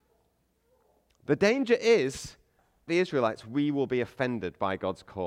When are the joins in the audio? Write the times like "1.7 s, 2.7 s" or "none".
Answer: 2.9 s